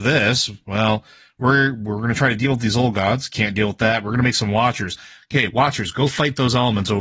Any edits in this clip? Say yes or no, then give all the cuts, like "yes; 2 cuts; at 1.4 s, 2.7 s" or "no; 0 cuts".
no; 0 cuts